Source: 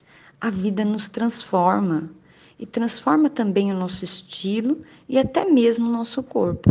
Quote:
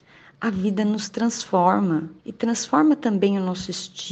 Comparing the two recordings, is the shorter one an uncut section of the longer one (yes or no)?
no